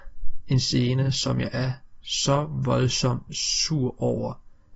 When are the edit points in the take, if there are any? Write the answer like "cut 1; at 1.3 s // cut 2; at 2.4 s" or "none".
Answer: none